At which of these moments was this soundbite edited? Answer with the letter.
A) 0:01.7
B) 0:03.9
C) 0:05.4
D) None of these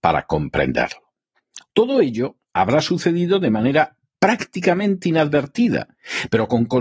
A